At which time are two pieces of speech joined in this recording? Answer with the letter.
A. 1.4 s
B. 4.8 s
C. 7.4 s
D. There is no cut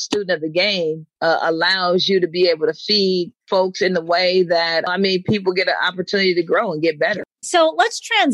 C